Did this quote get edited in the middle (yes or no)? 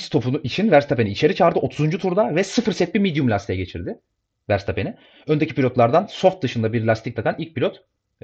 no